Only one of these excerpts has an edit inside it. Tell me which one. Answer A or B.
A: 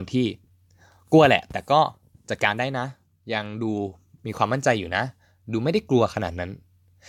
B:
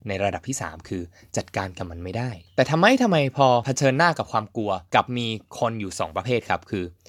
B